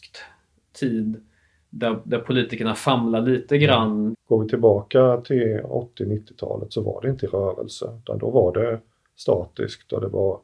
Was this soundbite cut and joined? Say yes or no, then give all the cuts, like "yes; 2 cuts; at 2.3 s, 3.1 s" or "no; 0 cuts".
yes; 1 cut; at 4.1 s